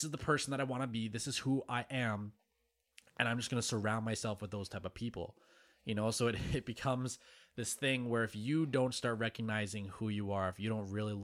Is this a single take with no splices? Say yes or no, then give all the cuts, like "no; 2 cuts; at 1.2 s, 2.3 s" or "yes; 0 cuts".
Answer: yes; 0 cuts